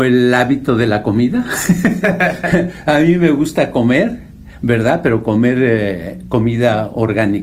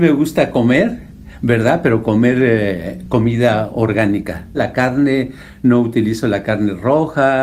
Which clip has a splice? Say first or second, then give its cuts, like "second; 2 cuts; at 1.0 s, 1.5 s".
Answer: second; 1 cut; at 4.5 s